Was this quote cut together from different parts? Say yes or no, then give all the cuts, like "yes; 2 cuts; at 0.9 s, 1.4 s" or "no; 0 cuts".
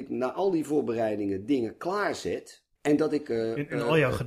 no; 0 cuts